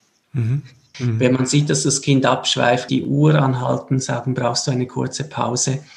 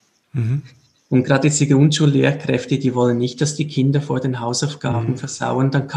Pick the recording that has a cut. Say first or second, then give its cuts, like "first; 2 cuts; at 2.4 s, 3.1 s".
first; 2 cuts; at 0.9 s, 2.9 s